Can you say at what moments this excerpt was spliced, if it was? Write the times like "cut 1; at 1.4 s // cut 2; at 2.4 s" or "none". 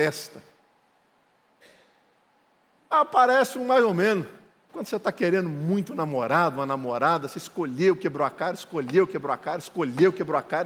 cut 1; at 2.7 s // cut 2; at 4.7 s